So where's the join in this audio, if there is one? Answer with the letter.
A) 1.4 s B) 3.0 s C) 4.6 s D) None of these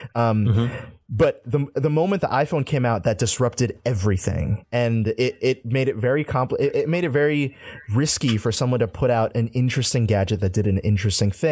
D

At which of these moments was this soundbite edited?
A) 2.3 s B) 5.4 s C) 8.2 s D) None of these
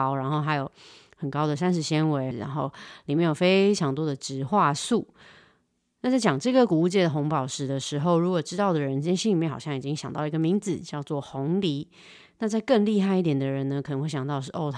A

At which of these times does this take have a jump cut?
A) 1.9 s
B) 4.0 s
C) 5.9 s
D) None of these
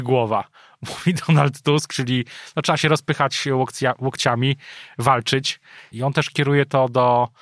C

